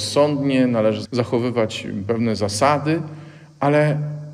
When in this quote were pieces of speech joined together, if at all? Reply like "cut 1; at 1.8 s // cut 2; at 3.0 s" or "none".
cut 1; at 1.0 s